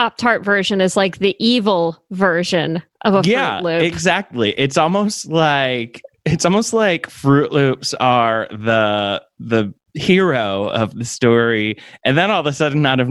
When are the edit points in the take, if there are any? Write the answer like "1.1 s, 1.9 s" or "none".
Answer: none